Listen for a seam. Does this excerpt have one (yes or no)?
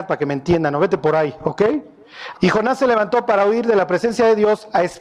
yes